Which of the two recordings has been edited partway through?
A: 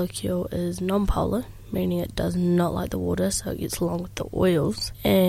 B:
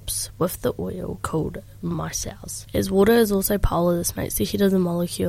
B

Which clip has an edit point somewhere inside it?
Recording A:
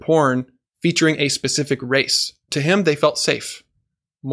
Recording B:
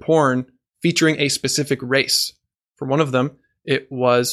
A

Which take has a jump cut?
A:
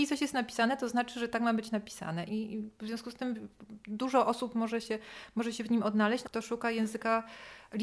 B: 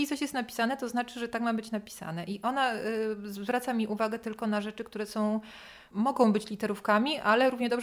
A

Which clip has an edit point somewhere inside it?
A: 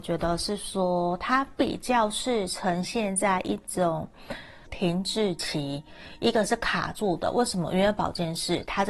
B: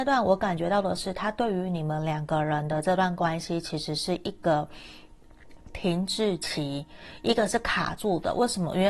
A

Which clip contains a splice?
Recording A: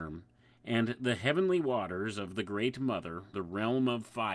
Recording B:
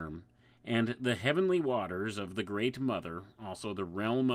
A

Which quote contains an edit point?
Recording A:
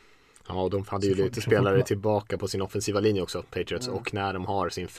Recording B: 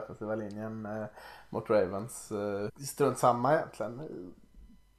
B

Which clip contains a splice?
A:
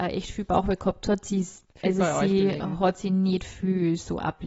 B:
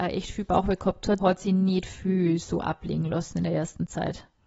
B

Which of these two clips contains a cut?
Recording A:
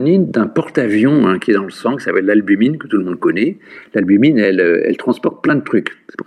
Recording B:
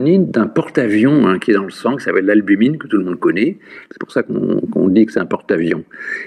B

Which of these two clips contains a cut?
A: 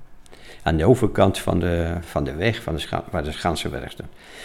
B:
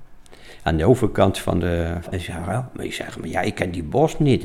B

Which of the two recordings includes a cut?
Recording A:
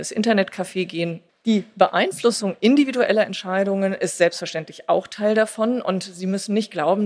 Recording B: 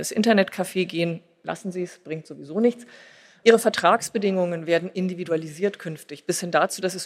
A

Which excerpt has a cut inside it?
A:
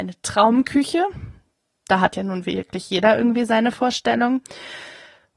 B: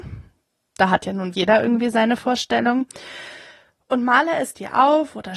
B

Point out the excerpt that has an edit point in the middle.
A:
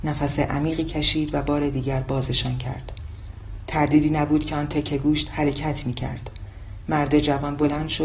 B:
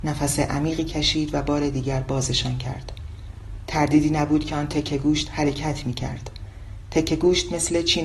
A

